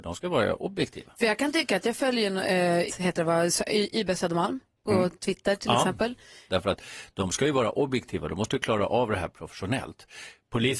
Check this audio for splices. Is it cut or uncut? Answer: cut